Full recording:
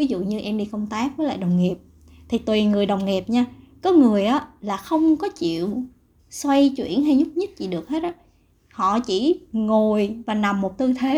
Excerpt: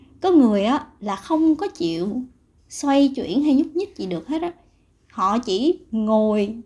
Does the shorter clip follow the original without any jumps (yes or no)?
yes